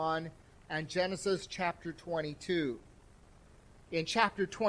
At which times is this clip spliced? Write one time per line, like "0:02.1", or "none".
none